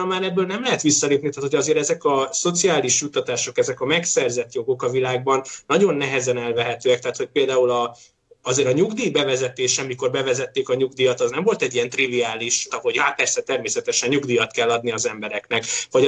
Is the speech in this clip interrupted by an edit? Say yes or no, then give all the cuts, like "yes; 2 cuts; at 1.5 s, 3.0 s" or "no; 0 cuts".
yes; 1 cut; at 12.7 s